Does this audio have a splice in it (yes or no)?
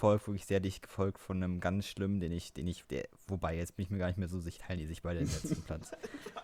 yes